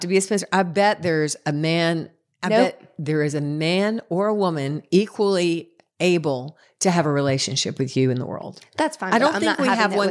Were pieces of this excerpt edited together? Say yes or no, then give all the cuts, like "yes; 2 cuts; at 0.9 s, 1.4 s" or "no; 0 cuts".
no; 0 cuts